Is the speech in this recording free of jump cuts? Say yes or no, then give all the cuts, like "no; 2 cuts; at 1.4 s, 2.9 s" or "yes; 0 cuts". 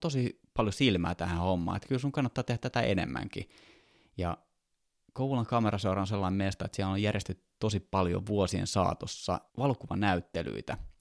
no; 1 cut; at 9.5 s